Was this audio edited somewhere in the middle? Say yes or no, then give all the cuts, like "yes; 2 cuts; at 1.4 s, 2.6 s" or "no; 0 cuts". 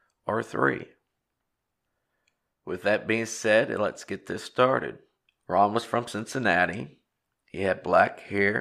yes; 1 cut; at 5.3 s